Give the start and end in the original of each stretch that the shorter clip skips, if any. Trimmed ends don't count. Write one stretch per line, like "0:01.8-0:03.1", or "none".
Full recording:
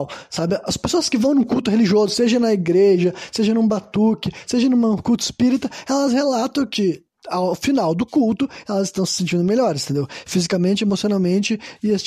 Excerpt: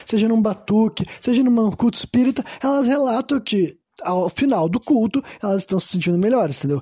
none